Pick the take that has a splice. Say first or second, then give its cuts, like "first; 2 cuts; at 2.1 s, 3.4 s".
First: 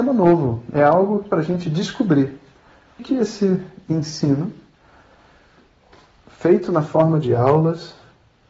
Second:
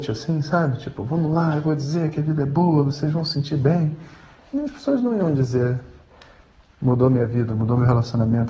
first; 1 cut; at 3.0 s